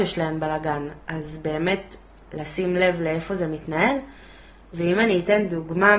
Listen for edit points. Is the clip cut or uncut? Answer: cut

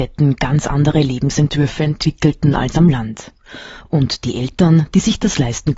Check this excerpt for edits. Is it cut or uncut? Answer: uncut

